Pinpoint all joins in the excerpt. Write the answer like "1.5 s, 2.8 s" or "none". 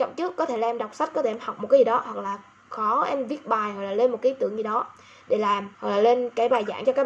5.7 s